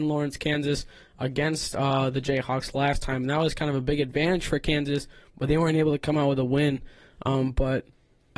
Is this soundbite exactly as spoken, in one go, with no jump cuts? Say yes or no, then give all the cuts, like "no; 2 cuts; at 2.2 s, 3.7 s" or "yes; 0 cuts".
yes; 0 cuts